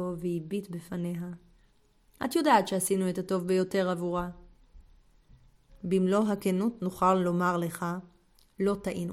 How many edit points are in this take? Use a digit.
1